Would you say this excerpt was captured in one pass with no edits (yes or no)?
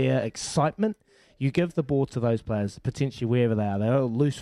yes